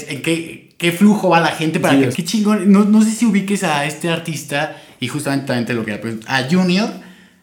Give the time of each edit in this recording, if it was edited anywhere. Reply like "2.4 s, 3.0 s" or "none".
2.1 s